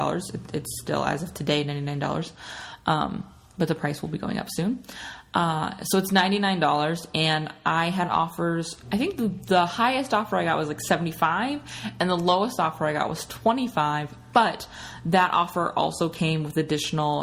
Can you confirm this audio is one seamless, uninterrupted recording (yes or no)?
yes